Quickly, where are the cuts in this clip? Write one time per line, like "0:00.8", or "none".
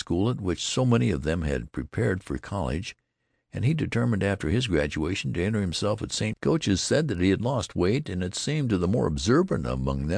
0:06.3